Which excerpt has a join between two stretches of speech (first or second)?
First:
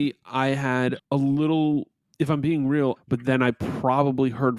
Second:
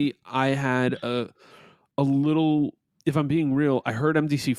first